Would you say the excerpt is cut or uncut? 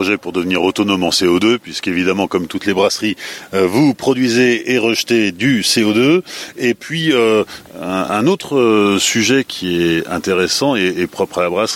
uncut